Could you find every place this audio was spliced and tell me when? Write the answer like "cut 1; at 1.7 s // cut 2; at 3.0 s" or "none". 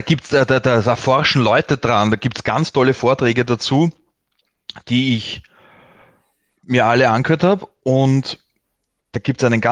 none